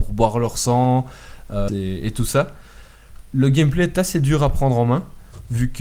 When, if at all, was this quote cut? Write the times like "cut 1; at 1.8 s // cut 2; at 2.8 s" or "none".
cut 1; at 1.7 s